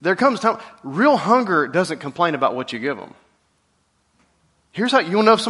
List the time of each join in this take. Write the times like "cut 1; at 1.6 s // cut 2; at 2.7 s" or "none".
none